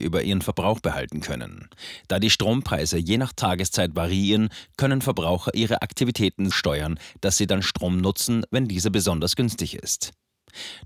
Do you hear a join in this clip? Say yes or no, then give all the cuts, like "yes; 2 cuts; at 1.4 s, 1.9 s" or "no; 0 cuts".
yes; 1 cut; at 6.5 s